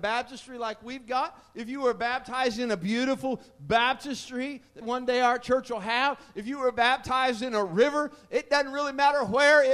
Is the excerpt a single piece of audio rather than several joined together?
no; 1 cut; at 4.8 s

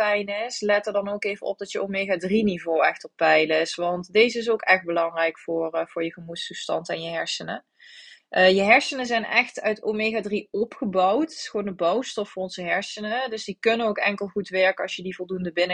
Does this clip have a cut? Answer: no; 0 cuts

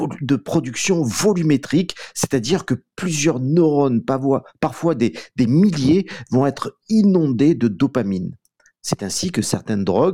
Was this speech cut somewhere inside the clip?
no; 0 cuts

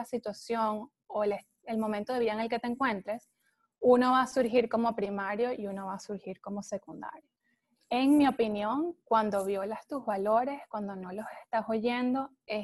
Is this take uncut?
yes; 0 cuts

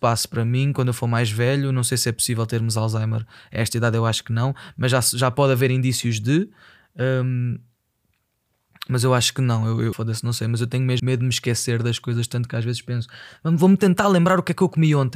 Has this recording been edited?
yes; 2 cuts; at 9.9 s, 11.0 s

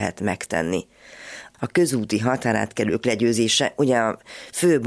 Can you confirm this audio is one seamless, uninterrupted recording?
no; 1 cut; at 1.5 s

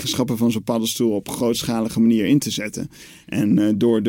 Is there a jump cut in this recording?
no; 0 cuts

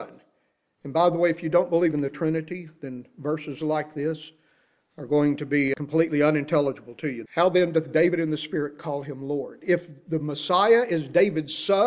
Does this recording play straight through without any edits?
no; 1 cut; at 7.3 s

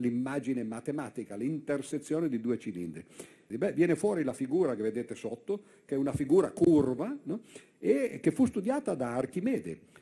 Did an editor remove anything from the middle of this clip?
yes; 1 cut; at 3.5 s

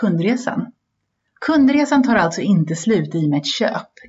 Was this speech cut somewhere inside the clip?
no; 0 cuts

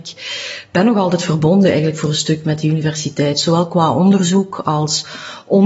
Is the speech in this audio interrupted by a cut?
no; 0 cuts

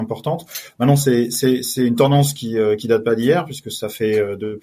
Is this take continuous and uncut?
yes; 0 cuts

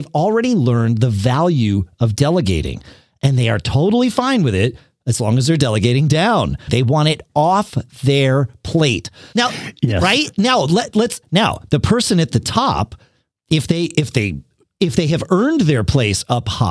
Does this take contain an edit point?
yes; 3 cuts; at 6.7 s, 9.3 s, 11.2 s

